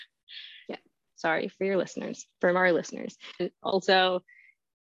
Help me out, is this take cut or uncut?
cut